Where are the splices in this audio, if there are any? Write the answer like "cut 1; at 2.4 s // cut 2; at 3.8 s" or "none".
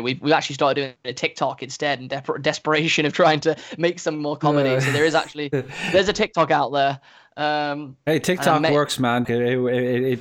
cut 1; at 9.2 s